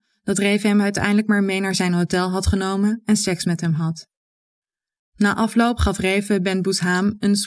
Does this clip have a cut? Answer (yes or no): no